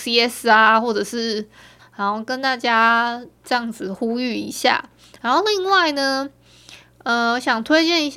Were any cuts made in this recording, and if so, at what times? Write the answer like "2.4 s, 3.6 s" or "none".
1.8 s